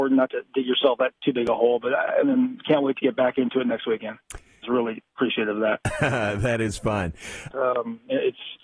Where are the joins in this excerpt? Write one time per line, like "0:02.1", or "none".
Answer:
0:02.2
0:04.6
0:07.5